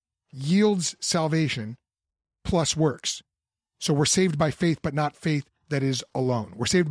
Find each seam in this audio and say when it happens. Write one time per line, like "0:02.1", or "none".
none